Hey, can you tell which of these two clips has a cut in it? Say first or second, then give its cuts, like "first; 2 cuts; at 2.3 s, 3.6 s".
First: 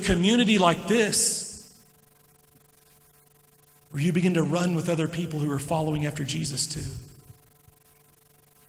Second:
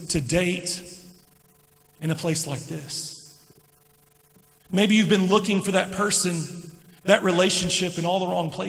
second; 1 cut; at 4.5 s